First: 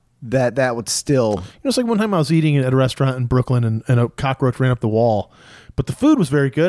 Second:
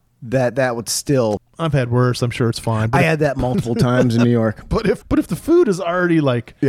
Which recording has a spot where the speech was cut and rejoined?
second; 2 cuts; at 1.4 s, 5.0 s

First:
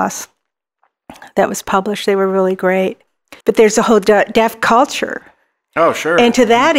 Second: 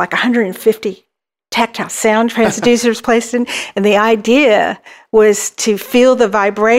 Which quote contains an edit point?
first; 1 cut; at 3.4 s

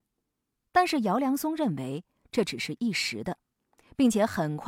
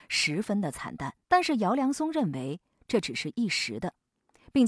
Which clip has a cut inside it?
second; 1 cut; at 1.2 s

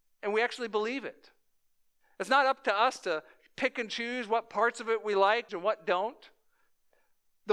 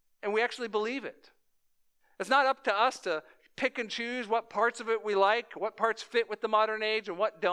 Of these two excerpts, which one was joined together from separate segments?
first; 1 cut; at 5.5 s

